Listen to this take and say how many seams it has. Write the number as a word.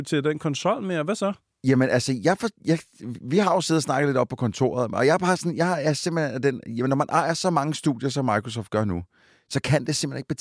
zero